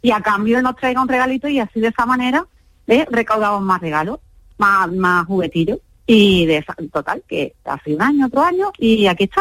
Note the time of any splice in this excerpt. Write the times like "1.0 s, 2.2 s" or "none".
none